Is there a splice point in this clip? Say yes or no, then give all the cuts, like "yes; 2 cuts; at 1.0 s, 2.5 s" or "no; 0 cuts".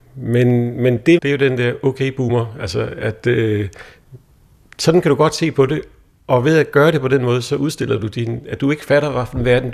yes; 1 cut; at 1.2 s